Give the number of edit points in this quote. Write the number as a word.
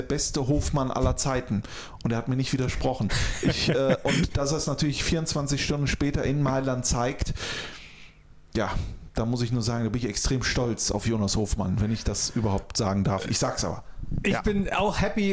zero